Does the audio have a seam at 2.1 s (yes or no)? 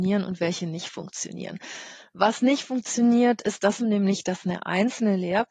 no